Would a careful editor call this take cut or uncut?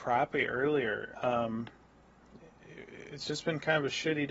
cut